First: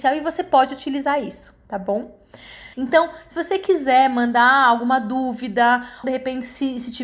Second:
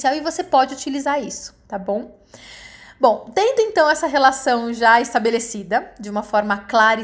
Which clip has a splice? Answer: first; 2 cuts; at 2.7 s, 6.0 s

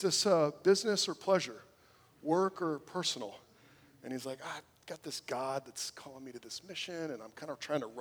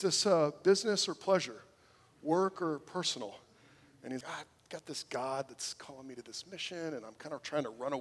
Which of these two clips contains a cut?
second; 1 cut; at 4.2 s

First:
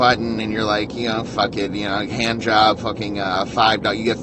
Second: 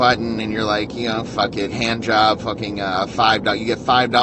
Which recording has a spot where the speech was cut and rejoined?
second; 1 cut; at 1.7 s

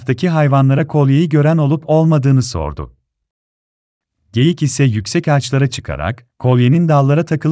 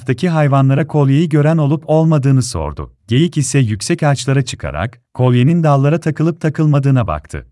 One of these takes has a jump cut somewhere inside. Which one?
second; 1 cut; at 3.0 s

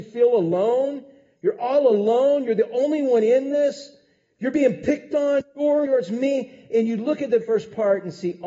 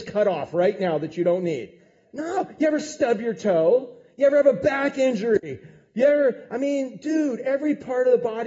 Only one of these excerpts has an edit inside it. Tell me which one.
first; 2 cuts; at 5.9 s, 7.4 s

